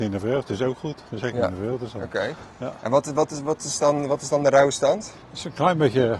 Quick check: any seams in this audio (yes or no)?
yes